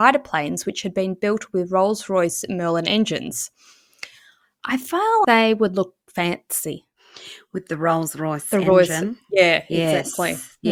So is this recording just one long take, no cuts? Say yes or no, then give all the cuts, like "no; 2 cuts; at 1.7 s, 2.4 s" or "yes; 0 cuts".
no; 1 cut; at 5.2 s